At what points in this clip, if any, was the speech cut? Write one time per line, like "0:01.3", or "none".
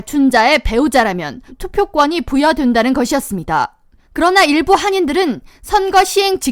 0:04.0